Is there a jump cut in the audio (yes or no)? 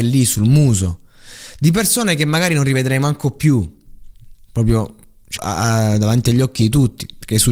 yes